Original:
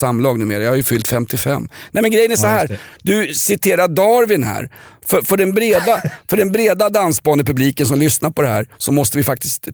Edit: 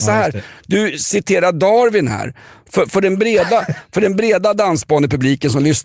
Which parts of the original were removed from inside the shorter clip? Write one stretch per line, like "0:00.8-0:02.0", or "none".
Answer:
none

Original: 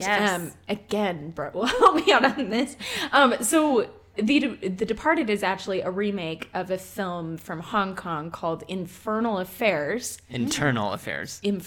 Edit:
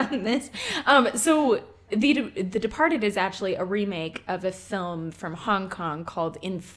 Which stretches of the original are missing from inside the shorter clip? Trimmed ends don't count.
none

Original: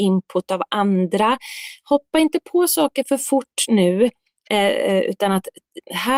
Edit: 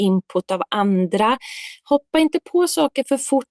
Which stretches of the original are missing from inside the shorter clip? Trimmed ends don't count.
none

